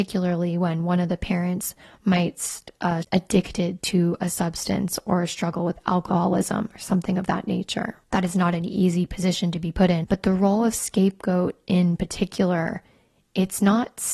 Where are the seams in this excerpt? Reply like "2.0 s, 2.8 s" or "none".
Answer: 3.0 s, 8.1 s, 10.0 s